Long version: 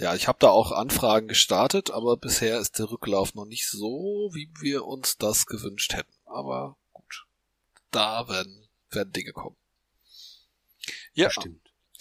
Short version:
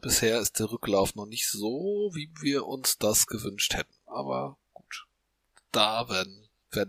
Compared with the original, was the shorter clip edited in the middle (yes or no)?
no